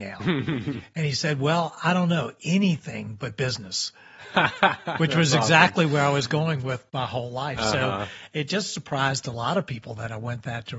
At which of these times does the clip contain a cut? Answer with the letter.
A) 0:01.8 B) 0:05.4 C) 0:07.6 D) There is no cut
D